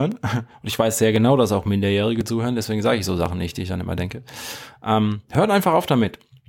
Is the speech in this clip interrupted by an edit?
no; 0 cuts

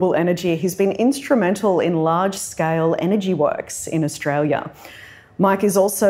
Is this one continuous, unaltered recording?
yes; 0 cuts

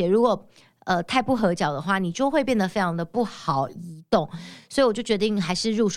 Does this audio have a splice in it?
no; 0 cuts

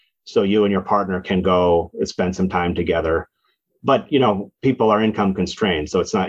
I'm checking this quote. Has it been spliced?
no; 0 cuts

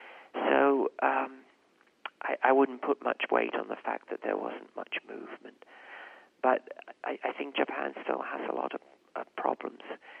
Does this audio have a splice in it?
no; 0 cuts

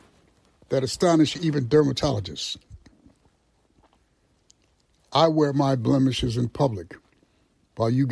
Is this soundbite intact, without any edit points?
yes; 0 cuts

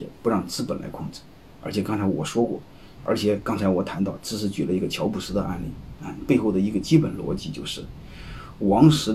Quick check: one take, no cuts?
no; 2 cuts; at 3.0 s, 5.9 s

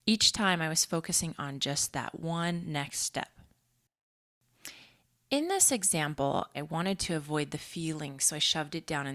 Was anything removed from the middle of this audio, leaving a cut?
yes; 1 cut; at 6.5 s

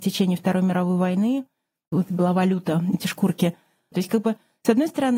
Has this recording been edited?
yes; 1 cut; at 3.9 s

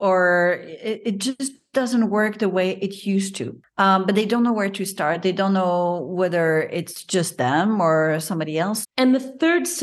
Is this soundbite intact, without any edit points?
no; 1 cut; at 8.8 s

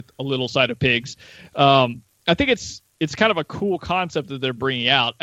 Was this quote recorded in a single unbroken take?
yes; 0 cuts

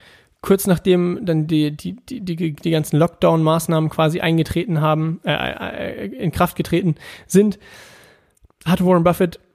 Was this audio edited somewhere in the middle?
no; 0 cuts

